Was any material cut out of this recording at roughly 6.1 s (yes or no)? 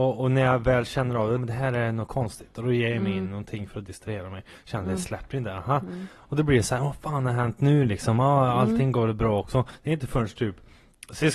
no